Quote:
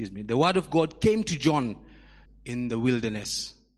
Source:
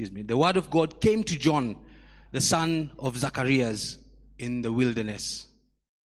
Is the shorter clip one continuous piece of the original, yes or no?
no